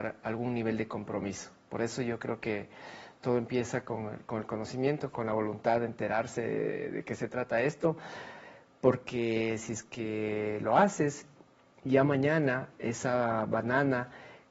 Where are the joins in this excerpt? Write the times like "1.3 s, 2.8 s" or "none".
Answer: none